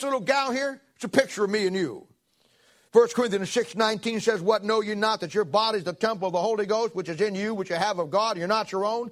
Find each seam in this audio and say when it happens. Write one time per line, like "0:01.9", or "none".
none